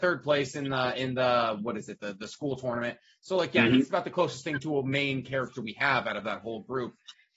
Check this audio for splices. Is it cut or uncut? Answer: uncut